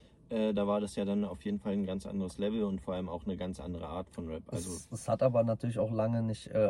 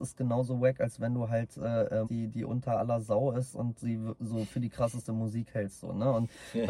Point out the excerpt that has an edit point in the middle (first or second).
second